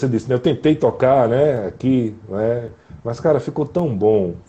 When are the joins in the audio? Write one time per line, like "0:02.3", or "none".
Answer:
none